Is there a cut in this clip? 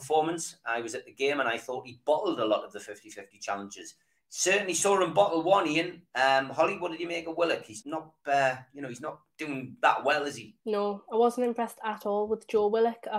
yes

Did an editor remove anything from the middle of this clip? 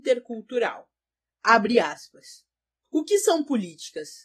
no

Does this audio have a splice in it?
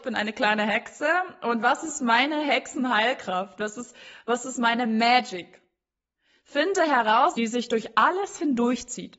yes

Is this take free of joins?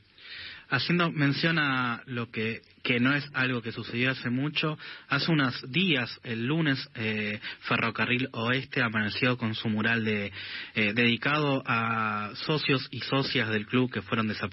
yes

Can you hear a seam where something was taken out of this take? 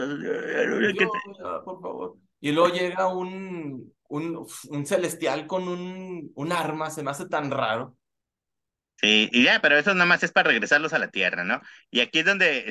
no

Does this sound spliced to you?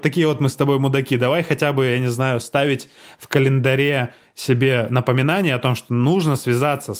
no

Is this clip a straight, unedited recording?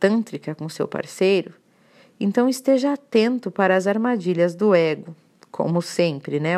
yes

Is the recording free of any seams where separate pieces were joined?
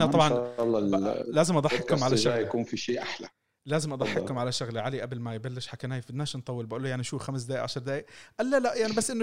yes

